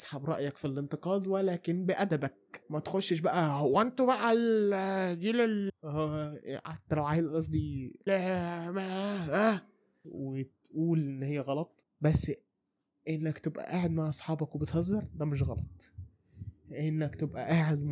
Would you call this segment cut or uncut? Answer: cut